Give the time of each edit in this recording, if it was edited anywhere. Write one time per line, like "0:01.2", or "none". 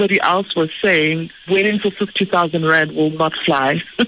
0:01.5